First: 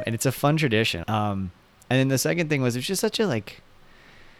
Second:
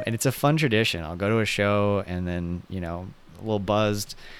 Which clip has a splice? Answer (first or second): first